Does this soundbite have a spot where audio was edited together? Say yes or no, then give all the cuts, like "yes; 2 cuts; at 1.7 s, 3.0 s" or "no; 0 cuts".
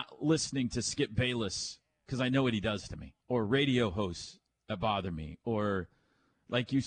yes; 1 cut; at 3.2 s